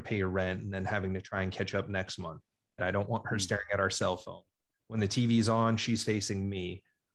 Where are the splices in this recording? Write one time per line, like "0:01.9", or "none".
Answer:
0:02.8